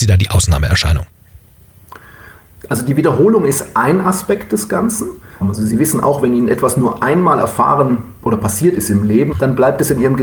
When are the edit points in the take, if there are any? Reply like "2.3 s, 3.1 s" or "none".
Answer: 5.4 s, 9.3 s